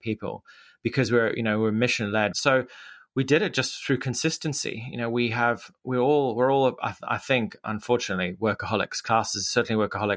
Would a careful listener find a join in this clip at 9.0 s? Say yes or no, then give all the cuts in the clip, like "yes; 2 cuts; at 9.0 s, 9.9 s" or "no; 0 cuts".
no; 1 cut; at 2.3 s